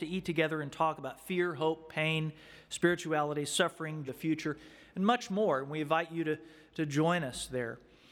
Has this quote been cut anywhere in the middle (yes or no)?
yes